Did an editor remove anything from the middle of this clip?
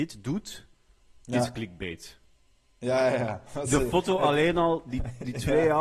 no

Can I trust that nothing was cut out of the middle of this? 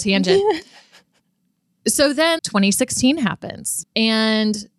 no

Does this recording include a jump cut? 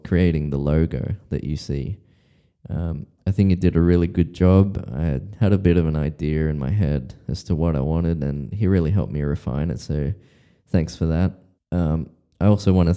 yes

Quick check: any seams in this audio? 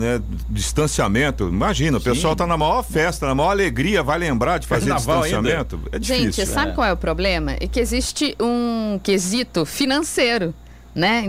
no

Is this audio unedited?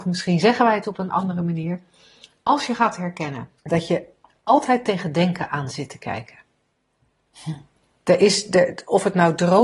no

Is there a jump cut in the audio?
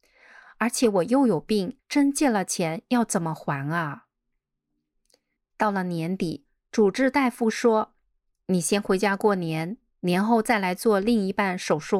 yes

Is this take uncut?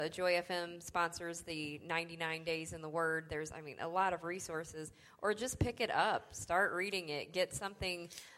yes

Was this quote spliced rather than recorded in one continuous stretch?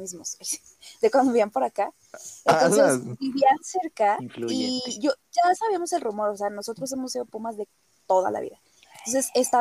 no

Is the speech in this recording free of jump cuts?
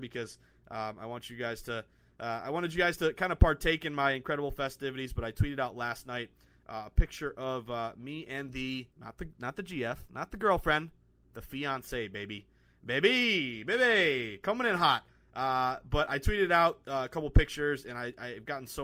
no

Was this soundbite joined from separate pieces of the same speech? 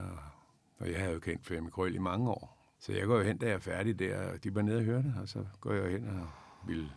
yes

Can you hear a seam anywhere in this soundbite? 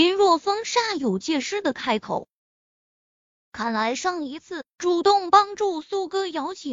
no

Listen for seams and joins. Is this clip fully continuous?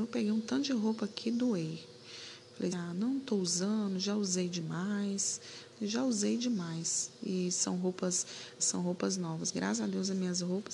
no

